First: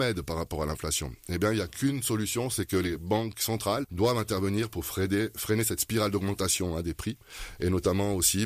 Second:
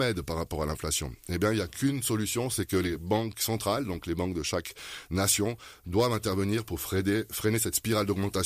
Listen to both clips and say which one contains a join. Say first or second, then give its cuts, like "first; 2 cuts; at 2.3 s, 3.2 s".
first; 1 cut; at 3.8 s